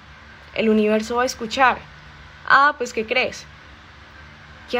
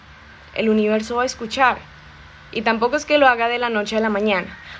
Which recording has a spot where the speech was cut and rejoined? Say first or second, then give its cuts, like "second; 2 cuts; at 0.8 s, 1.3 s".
first; 1 cut; at 2.4 s